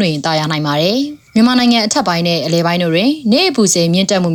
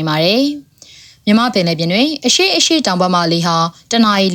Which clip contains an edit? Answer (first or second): first